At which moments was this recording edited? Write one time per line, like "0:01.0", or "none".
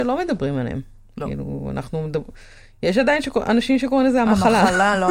none